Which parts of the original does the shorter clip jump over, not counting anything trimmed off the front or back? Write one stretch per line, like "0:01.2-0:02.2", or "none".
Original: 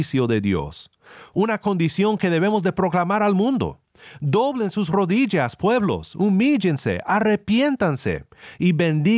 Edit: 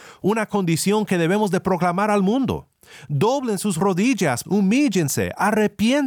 0:05.6-0:06.1